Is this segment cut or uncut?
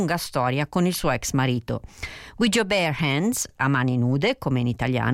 uncut